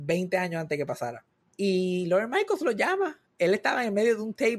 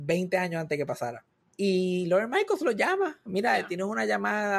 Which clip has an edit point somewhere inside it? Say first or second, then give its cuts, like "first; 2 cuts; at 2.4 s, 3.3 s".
second; 1 cut; at 3.3 s